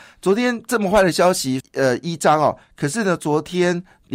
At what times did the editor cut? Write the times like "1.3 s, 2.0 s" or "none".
1.6 s